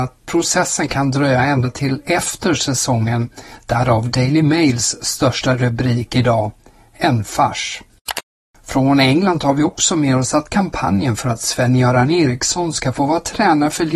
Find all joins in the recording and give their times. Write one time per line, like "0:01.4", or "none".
none